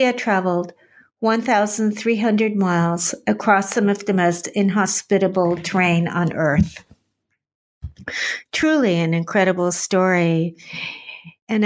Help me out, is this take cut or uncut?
uncut